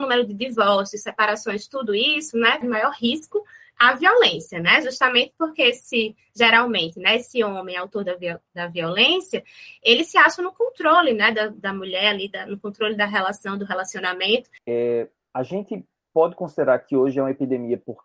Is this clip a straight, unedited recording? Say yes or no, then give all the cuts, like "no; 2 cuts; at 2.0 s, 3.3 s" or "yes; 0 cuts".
no; 2 cuts; at 2.6 s, 14.6 s